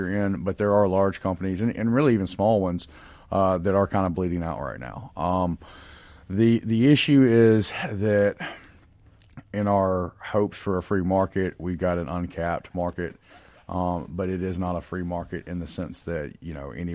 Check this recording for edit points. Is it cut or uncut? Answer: uncut